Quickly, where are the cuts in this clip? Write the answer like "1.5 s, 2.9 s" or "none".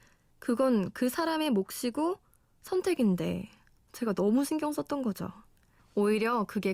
5.8 s